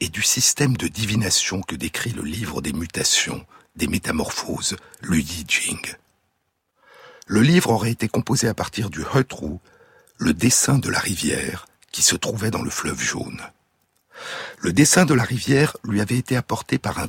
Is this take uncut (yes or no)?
yes